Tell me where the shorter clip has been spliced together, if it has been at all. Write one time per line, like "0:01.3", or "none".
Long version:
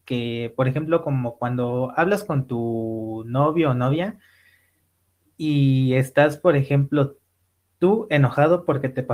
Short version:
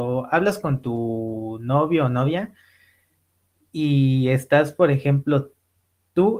none